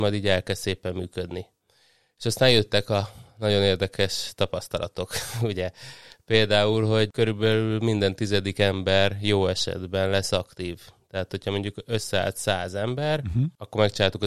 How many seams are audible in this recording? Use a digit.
0